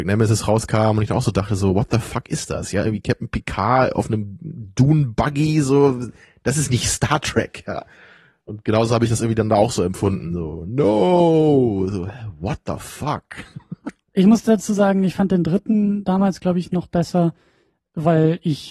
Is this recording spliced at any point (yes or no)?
no